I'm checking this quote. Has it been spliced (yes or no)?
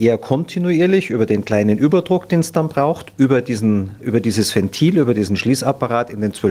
no